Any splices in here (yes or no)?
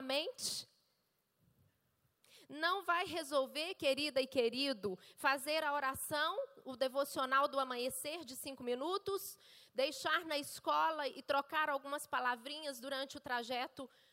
no